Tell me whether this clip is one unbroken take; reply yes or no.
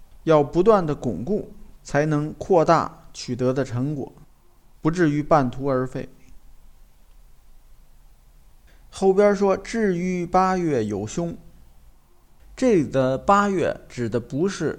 yes